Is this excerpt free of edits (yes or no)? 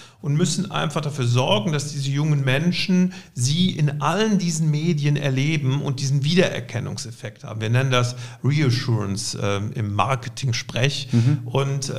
yes